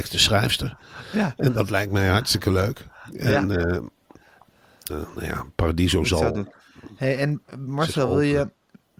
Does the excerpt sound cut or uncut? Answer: cut